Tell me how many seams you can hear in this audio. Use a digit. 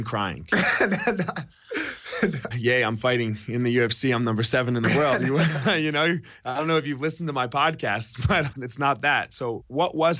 2